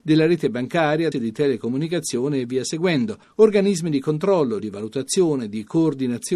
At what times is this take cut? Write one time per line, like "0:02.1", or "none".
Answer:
0:01.1
0:04.6